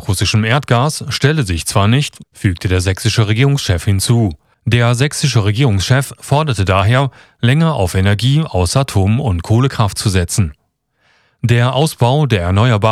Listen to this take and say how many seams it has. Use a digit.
2